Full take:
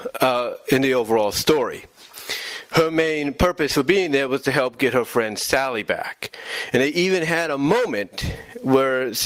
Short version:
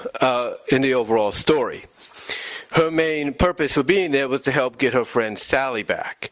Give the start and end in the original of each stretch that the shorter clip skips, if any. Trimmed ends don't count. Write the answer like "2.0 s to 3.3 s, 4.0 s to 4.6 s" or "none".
none

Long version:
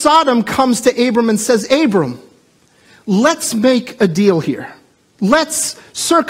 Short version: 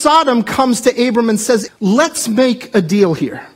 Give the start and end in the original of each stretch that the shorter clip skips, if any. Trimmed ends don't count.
1.7 s to 2.9 s

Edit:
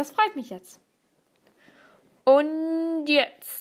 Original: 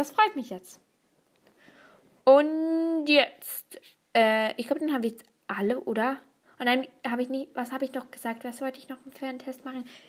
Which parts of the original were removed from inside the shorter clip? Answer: none

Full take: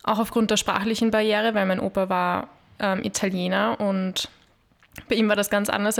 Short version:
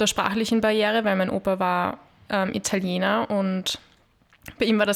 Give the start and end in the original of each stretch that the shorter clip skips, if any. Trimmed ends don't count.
none

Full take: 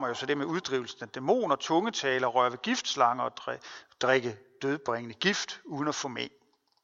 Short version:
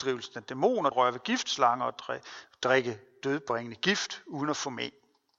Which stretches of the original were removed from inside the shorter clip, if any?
1.6 s to 2.3 s

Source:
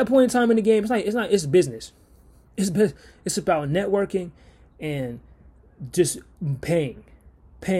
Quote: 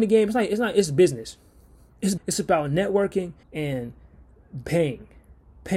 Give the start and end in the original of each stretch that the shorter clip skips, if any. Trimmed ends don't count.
2.7 s to 3.2 s, 4.4 s to 4.7 s, 5.9 s to 6.6 s

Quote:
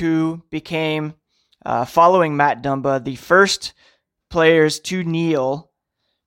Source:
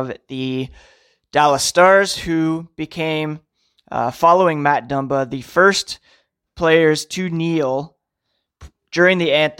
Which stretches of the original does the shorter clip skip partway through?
none

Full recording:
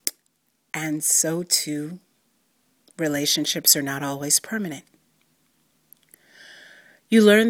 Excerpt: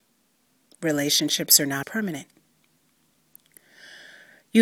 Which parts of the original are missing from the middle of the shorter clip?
4.0 s to 4.4 s

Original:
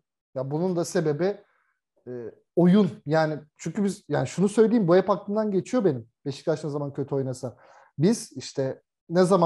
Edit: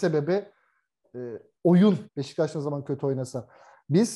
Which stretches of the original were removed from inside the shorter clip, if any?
3.0 s to 6.2 s

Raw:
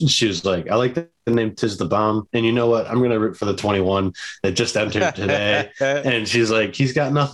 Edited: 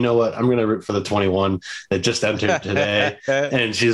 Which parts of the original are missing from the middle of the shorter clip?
none

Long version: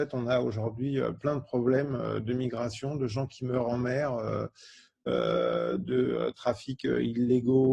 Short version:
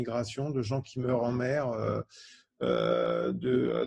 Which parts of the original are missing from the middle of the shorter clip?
none

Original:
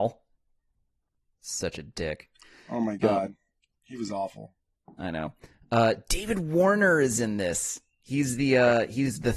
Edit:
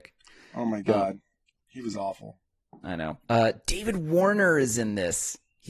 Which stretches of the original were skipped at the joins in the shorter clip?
5.4 s to 5.7 s

